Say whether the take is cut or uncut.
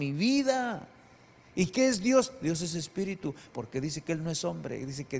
cut